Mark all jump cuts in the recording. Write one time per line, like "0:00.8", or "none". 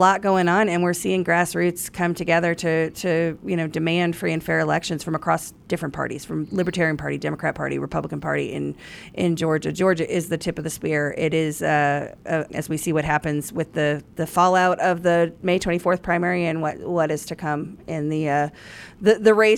0:12.5